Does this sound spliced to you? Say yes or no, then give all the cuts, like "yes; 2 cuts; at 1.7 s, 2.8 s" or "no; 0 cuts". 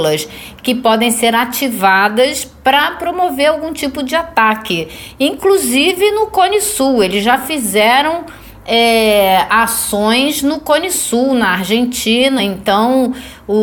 no; 0 cuts